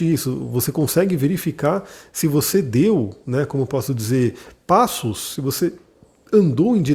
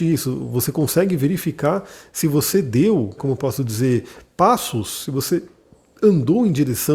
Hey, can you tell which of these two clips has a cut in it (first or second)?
second